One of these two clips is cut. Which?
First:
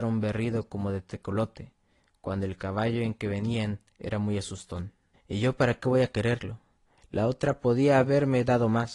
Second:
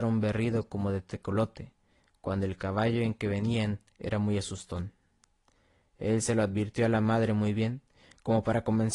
first; 2 cuts; at 5.1 s, 7.0 s

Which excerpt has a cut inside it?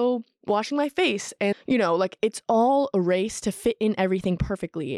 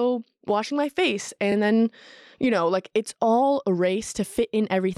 first; 1 cut; at 1.5 s

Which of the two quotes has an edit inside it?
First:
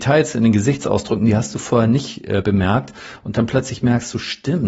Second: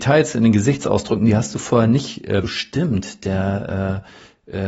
second; 1 cut; at 2.4 s

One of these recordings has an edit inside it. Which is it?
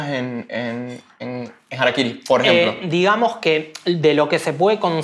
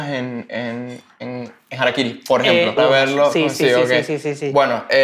second; 1 cut; at 2.8 s

